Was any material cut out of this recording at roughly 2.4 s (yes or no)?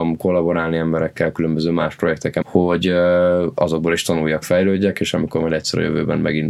yes